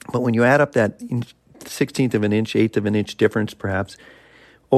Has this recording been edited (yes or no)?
no